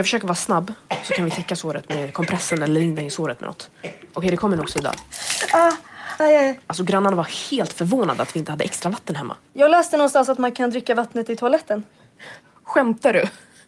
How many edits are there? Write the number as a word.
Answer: two